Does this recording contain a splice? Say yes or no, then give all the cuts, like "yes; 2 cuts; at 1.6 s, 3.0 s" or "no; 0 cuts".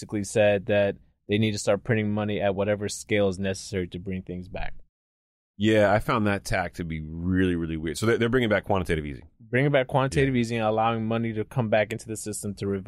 no; 0 cuts